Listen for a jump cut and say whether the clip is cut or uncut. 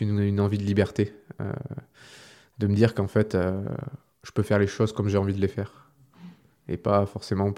uncut